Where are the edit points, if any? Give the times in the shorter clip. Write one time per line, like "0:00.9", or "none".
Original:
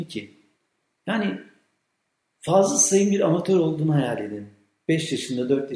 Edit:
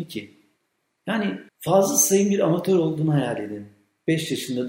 0:01.5